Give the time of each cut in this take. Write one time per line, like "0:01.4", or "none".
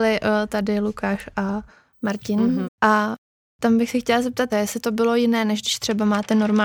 0:02.6
0:04.5